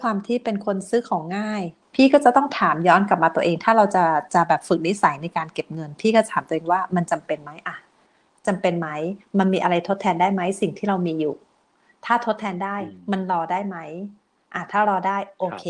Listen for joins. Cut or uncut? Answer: uncut